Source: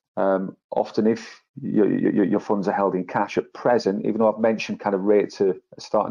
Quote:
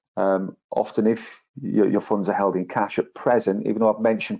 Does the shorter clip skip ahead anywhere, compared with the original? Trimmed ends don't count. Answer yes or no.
yes